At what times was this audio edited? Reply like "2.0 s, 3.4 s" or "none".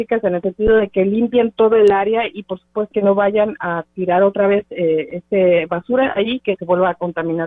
2.9 s